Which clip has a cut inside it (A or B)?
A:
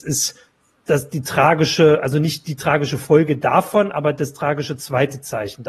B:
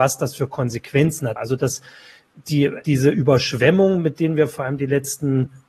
B